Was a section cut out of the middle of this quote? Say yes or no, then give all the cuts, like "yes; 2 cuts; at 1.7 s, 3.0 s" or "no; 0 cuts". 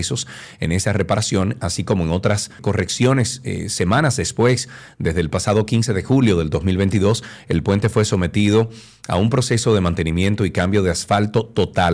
yes; 1 cut; at 2.6 s